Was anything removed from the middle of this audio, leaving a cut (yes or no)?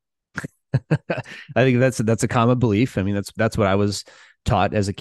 no